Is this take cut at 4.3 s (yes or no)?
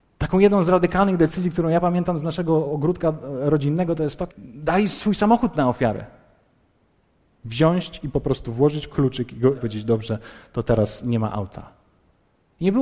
yes